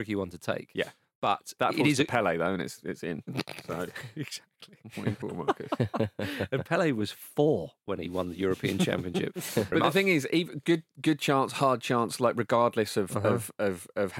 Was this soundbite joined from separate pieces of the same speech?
yes; 2 cuts; at 5.2 s, 9.7 s

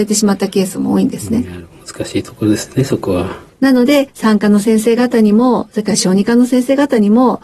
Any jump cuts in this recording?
yes; 1 cut; at 3.5 s

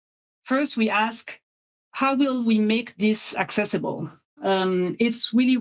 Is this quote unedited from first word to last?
no; 1 cut; at 4.4 s

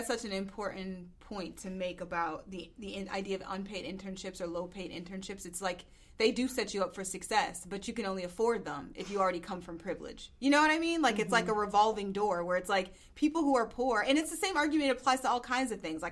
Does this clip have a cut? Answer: no; 0 cuts

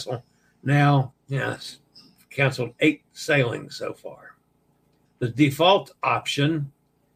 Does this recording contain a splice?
yes; 2 cuts; at 1.1 s, 5.1 s

